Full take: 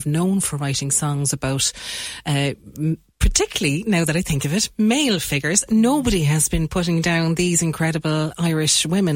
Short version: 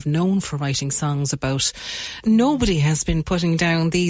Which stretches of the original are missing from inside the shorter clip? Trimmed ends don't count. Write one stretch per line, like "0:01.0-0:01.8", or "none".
0:02.2-0:05.7